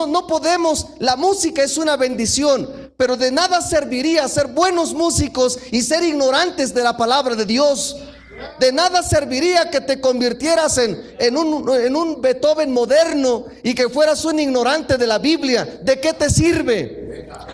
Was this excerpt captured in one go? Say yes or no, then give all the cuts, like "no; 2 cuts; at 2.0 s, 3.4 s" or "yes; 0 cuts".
yes; 0 cuts